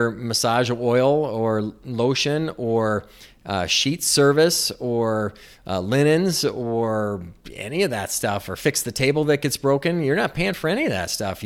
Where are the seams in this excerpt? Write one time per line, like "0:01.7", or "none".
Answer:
none